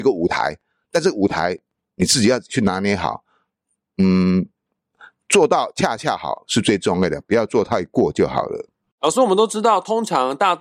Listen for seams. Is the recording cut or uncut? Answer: uncut